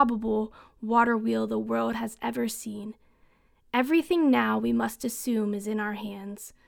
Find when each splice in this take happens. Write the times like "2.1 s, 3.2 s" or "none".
none

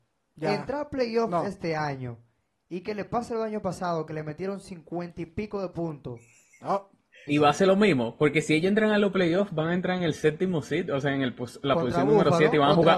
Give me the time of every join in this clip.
7.3 s

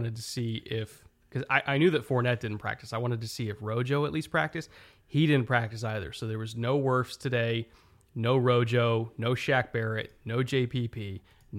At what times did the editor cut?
none

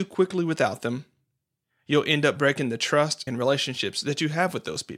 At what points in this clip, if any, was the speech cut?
3.3 s

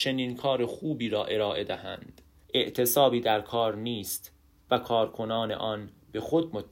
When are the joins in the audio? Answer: 2.4 s

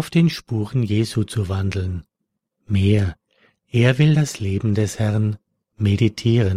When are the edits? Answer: none

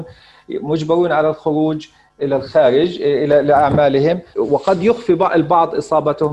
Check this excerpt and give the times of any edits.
2.2 s, 4.3 s

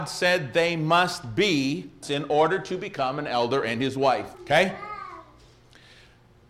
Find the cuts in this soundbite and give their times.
2.0 s, 4.3 s

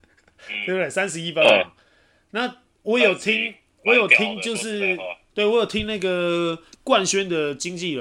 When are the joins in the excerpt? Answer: none

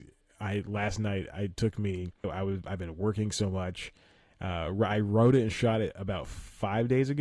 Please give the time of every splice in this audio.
2.2 s

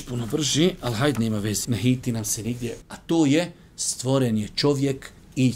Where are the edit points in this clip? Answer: 1.6 s, 2.8 s

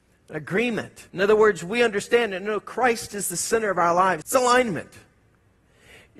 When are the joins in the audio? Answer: 1.1 s, 4.2 s

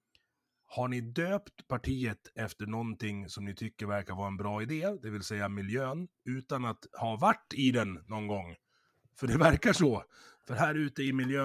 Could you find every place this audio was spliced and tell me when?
none

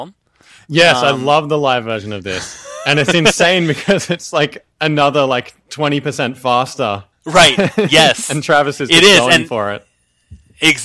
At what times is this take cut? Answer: none

